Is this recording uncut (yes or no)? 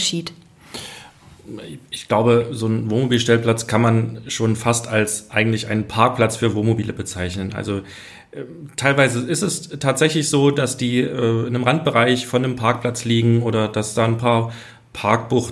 yes